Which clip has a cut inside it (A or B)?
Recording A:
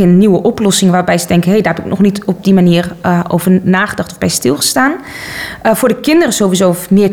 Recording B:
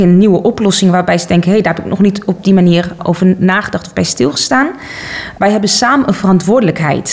B